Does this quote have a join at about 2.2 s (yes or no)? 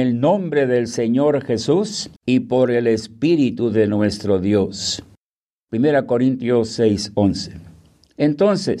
yes